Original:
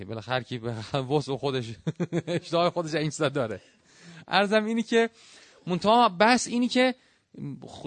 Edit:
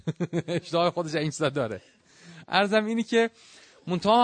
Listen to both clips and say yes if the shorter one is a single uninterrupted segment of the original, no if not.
yes